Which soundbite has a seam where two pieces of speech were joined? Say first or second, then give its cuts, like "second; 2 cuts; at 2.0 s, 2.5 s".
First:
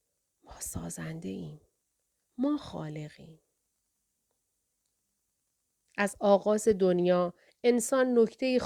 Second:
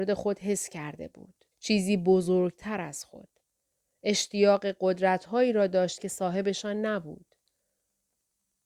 second; 1 cut; at 1.5 s